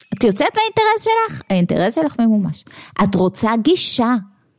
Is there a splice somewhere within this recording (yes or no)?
no